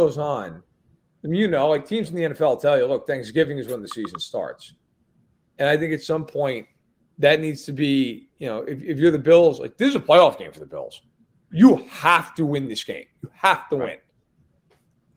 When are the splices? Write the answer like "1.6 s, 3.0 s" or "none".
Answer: 11.5 s